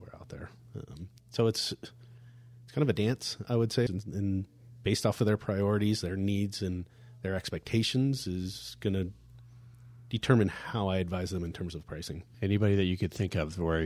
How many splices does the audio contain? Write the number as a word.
two